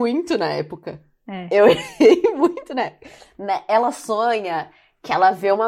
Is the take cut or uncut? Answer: uncut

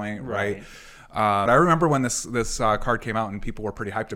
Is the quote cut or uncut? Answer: cut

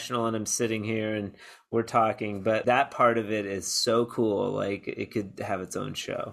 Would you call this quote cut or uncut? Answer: cut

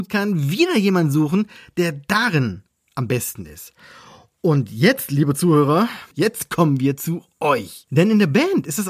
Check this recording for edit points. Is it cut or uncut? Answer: uncut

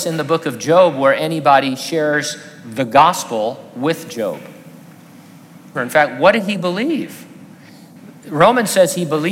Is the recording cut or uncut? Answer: cut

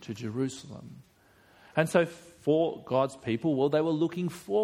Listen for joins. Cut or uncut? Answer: uncut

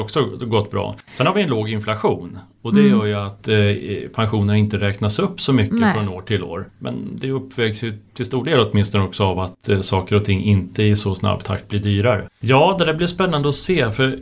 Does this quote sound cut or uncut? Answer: cut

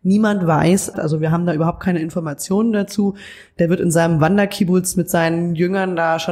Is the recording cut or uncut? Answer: cut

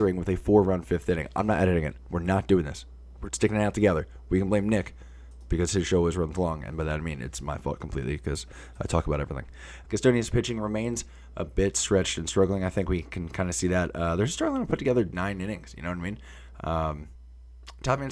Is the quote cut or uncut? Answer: cut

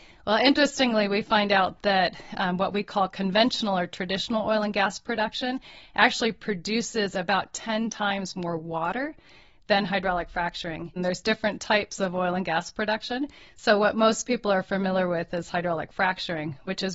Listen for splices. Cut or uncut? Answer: cut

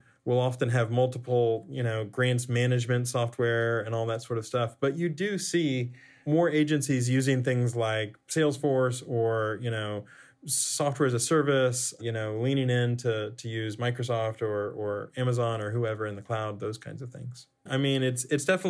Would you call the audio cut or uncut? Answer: cut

